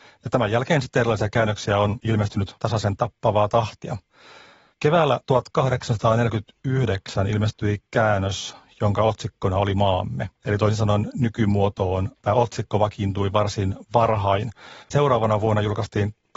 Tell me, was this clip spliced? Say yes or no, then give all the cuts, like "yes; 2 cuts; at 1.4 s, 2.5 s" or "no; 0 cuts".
yes; 2 cuts; at 10.4 s, 14.8 s